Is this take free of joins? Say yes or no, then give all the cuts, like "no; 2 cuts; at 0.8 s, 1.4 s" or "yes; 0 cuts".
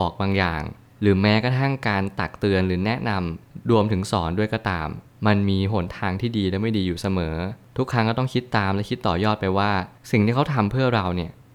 yes; 0 cuts